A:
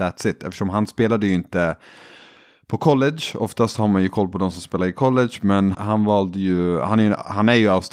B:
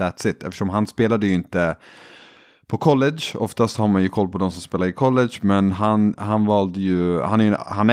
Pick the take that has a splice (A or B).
A